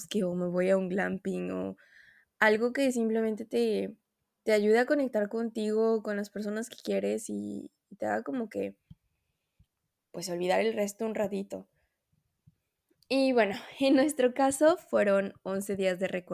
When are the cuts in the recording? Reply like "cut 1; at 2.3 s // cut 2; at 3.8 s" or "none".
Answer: none